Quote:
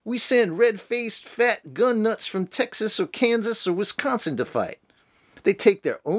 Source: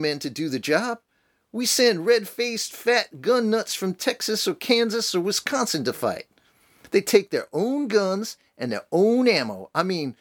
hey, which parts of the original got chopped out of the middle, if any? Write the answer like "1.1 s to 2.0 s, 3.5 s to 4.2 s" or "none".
none